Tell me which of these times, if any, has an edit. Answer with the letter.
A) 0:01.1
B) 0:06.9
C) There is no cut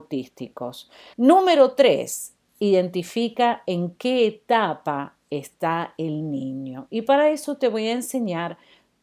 A